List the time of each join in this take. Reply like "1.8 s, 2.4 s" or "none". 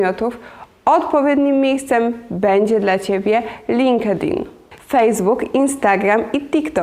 4.8 s